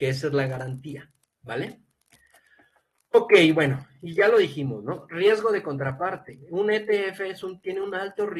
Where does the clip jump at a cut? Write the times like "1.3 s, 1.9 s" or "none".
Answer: none